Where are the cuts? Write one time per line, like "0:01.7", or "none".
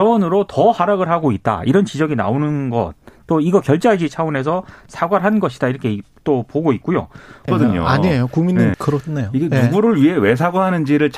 0:07.5
0:08.7

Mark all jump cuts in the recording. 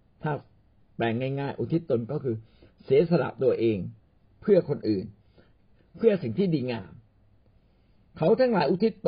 none

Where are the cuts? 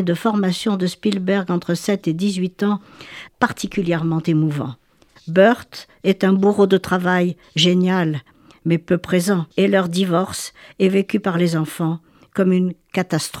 0:03.3
0:05.2
0:09.5

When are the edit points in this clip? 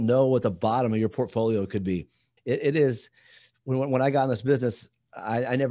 none

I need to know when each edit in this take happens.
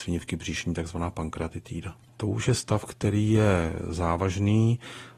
0:02.1

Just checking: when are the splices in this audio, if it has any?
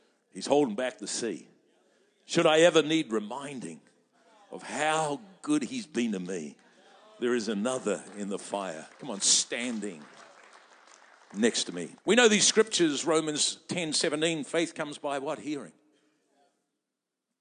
0:08.9
0:12.0

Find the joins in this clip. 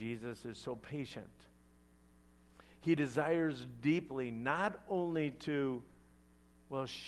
none

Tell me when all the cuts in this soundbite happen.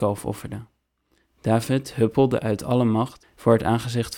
none

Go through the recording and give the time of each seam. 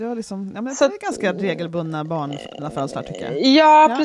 none

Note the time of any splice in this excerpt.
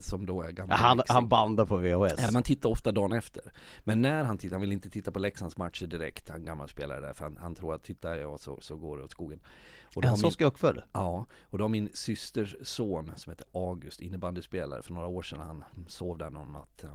none

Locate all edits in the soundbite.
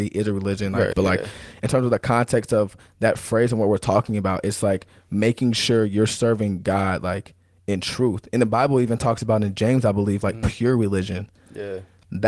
0:00.9

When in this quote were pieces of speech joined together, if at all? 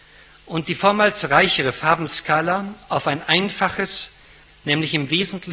0:04.5

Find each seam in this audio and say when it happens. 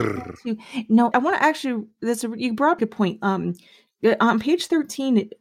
0:01.1
0:02.8

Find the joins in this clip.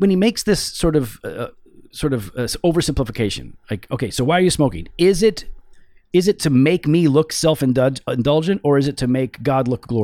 none

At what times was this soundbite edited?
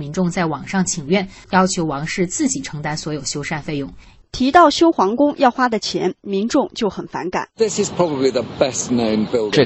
0:01.4
0:04.2

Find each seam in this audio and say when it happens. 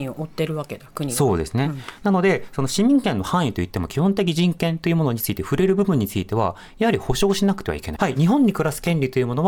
0:08.0

